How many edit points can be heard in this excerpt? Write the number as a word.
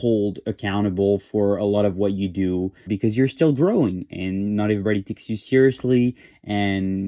one